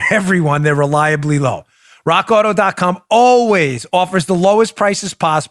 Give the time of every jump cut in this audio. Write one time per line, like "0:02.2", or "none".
none